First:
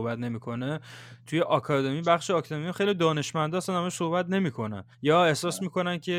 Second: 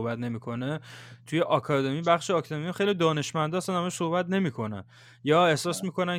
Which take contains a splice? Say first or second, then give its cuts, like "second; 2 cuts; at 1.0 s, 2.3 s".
first; 1 cut; at 4.9 s